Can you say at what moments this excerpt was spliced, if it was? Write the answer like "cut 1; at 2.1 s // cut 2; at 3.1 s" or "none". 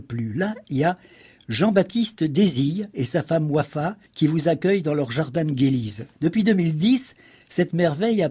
cut 1; at 4.1 s // cut 2; at 6.1 s